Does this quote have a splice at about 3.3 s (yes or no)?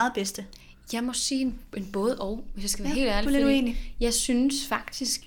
no